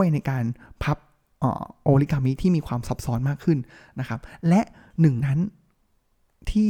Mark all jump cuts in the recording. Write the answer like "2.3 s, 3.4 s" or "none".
5.2 s